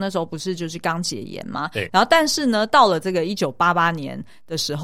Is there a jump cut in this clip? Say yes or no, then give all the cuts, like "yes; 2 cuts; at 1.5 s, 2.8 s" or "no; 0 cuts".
yes; 1 cut; at 1.9 s